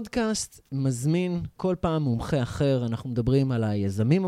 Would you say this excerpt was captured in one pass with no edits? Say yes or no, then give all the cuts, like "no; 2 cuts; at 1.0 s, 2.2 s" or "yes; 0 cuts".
no; 1 cut; at 1.6 s